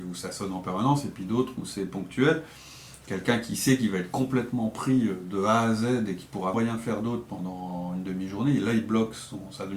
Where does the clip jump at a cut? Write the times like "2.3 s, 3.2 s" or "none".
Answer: 6.5 s